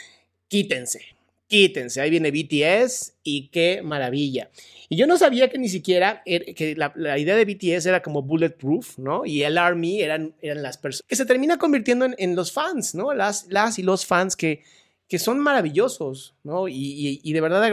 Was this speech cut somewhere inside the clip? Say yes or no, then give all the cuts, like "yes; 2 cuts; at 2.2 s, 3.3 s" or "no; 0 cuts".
yes; 1 cut; at 11.0 s